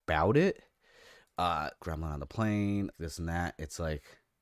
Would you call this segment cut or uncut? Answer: cut